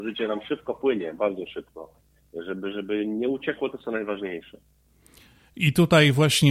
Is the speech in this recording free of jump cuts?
yes; 0 cuts

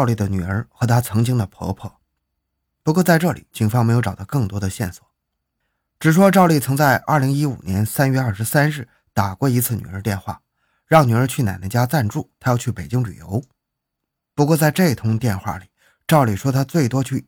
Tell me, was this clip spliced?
no; 0 cuts

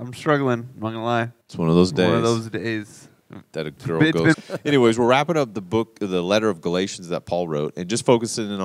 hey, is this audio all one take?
no; 2 cuts; at 1.4 s, 4.3 s

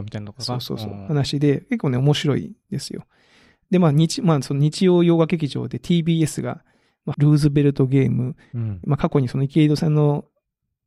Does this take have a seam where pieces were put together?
yes; 2 cuts; at 7.1 s, 8.8 s

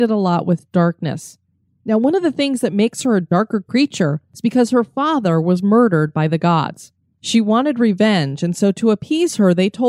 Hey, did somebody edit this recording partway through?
no; 0 cuts

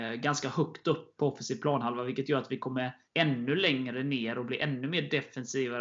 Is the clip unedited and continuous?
no; 2 cuts; at 1.2 s, 3.0 s

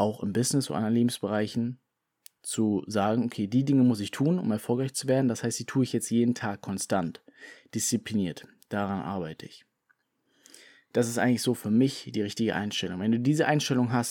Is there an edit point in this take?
no; 0 cuts

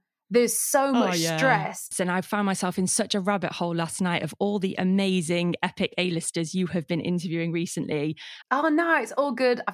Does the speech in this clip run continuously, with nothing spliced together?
no; 2 cuts; at 1.9 s, 8.4 s

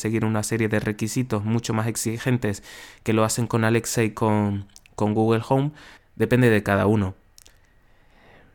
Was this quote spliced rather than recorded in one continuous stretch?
yes; 1 cut; at 6.0 s

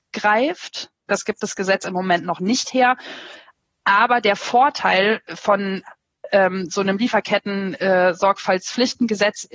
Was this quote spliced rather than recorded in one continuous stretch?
yes; 1 cut; at 1.1 s

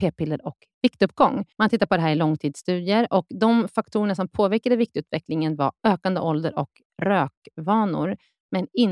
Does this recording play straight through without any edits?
no; 1 cut; at 1.5 s

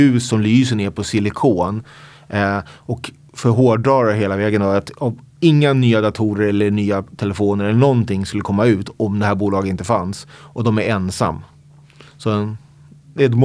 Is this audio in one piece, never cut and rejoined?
yes; 0 cuts

